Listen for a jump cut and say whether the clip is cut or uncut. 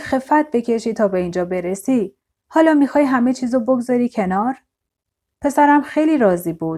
uncut